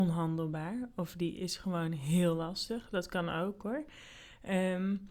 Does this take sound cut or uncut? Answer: uncut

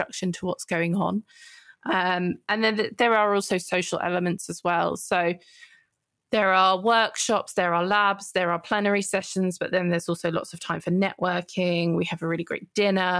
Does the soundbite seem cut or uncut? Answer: uncut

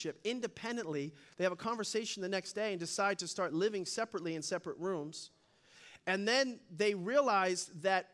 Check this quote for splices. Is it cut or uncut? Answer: uncut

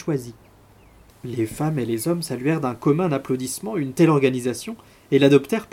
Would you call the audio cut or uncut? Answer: cut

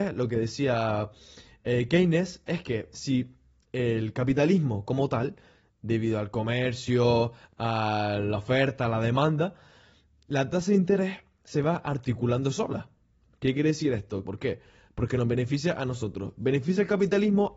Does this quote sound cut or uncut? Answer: cut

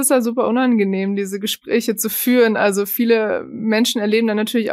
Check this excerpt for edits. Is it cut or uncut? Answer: uncut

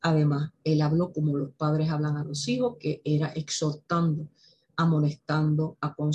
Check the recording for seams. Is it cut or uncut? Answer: uncut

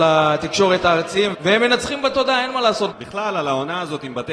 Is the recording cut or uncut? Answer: cut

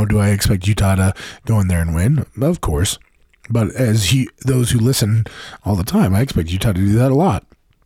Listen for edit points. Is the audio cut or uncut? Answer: uncut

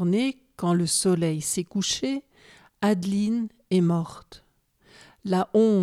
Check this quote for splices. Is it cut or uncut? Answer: uncut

